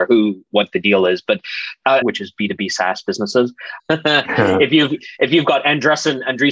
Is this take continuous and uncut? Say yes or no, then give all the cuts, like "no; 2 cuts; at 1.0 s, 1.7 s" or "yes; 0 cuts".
no; 2 cuts; at 2.0 s, 3.8 s